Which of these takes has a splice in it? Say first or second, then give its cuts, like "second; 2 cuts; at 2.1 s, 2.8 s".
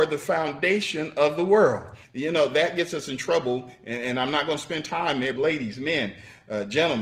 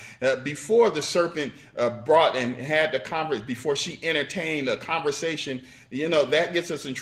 first; 2 cuts; at 2.0 s, 5.4 s